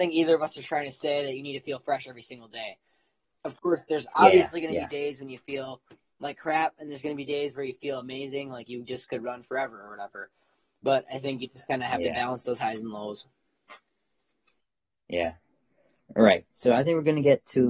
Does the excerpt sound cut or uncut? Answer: uncut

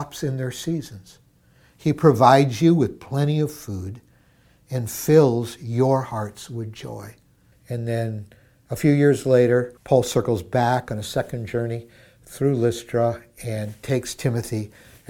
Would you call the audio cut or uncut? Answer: cut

